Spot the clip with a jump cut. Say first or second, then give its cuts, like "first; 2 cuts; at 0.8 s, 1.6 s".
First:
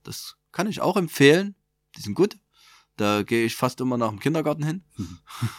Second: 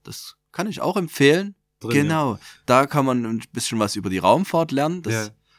second; 1 cut; at 1.8 s